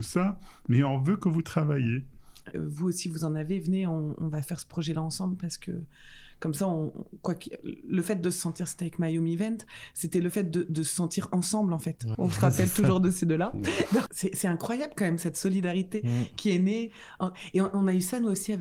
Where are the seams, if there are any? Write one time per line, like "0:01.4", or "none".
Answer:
0:02.5
0:12.1
0:14.1